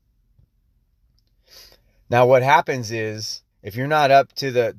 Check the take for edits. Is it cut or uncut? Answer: cut